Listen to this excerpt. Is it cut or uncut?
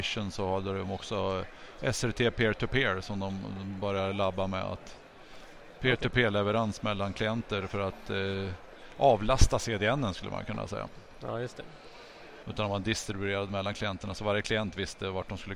cut